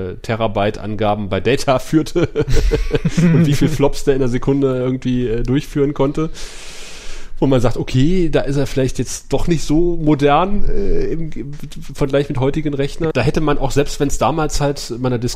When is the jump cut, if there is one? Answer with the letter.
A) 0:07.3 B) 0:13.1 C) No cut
B